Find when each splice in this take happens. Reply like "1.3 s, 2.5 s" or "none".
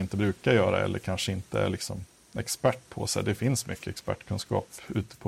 none